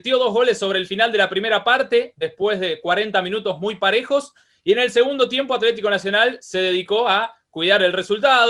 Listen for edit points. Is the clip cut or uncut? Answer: uncut